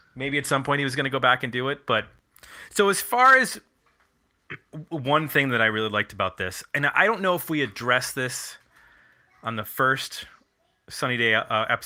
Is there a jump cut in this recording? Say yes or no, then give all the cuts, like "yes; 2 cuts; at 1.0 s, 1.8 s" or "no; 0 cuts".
no; 0 cuts